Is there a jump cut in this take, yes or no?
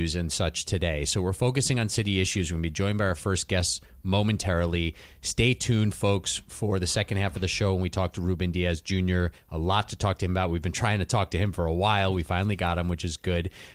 no